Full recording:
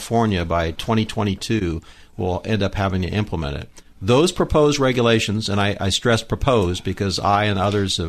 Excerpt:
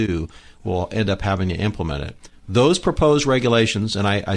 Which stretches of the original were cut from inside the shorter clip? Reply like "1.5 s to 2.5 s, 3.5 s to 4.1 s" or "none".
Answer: none